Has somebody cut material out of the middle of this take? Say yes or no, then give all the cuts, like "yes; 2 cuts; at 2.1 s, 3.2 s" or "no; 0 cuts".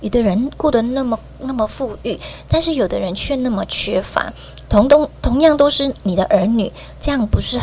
no; 0 cuts